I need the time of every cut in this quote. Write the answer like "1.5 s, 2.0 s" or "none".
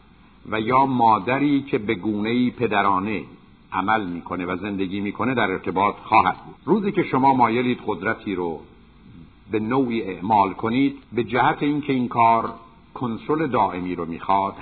6.6 s, 11.0 s